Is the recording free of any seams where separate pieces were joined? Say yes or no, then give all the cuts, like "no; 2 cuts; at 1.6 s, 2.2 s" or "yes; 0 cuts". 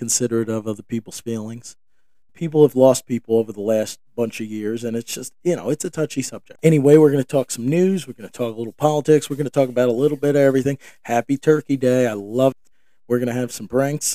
yes; 0 cuts